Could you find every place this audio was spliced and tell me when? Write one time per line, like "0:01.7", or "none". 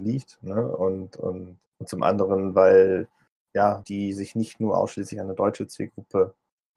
0:01.7
0:03.8